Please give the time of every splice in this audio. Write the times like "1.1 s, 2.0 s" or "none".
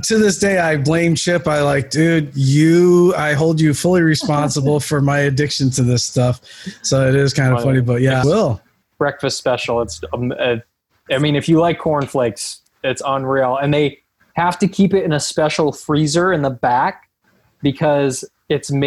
8.2 s